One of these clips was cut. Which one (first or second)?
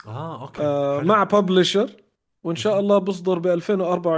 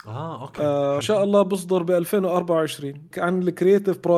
second